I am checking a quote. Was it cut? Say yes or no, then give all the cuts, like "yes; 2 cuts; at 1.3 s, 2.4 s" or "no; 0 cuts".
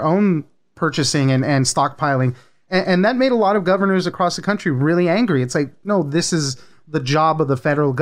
no; 0 cuts